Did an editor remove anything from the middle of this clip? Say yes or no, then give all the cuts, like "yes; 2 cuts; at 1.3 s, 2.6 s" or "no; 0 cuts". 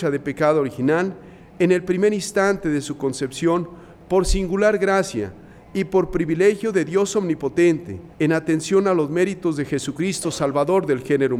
yes; 1 cut; at 8.1 s